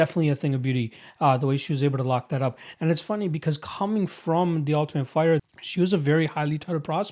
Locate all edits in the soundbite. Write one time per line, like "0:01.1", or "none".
0:02.7
0:05.4